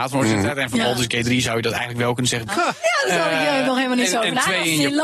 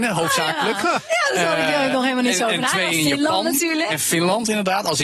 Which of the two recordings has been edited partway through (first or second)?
first